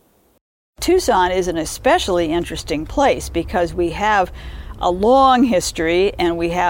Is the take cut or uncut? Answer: uncut